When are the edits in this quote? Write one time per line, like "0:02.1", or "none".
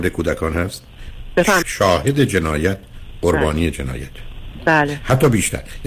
0:01.6